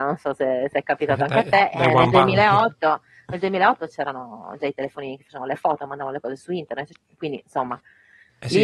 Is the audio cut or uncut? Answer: uncut